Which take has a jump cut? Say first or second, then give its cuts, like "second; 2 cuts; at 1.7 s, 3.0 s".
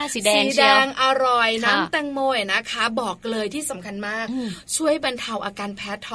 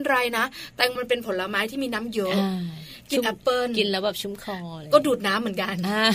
second; 1 cut; at 1.0 s